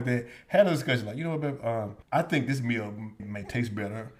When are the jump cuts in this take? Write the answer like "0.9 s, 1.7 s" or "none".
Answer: 2.0 s, 3.2 s